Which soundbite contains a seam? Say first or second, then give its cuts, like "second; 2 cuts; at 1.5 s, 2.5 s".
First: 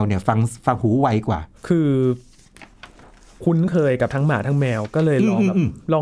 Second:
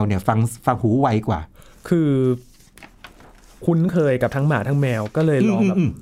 first; 1 cut; at 1.6 s